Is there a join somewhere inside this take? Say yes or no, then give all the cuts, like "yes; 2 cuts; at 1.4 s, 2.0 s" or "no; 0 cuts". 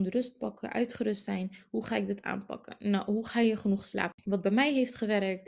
no; 0 cuts